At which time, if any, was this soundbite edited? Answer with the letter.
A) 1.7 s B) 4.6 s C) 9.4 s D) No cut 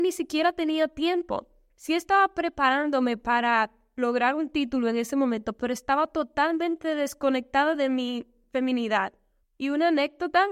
C